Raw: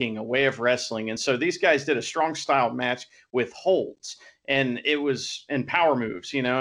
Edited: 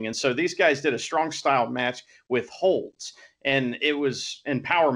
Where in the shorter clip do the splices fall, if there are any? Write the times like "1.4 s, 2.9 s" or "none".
none